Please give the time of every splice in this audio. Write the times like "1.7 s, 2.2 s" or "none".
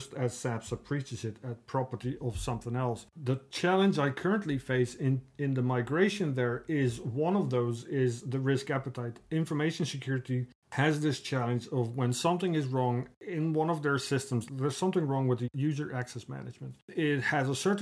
13.2 s, 14.5 s